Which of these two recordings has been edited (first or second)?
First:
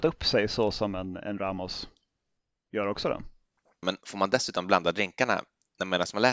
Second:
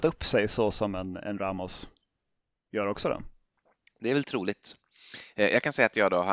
first